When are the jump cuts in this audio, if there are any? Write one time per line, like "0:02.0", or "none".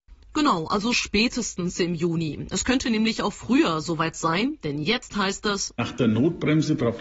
none